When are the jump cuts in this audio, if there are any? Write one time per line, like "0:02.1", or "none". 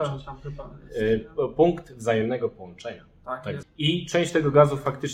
0:03.6